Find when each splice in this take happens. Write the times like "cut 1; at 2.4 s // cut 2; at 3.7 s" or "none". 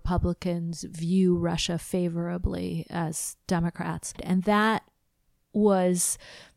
cut 1; at 4.2 s